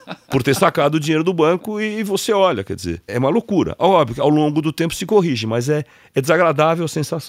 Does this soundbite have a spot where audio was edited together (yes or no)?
yes